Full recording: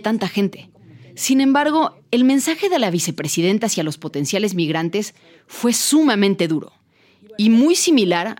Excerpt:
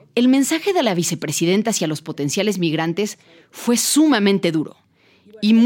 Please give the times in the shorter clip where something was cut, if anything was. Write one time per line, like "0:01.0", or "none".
none